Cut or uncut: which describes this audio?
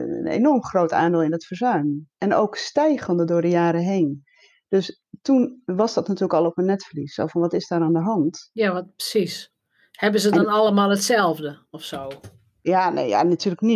uncut